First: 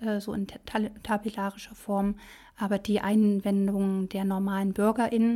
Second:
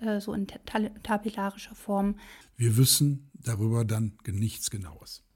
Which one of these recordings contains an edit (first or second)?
second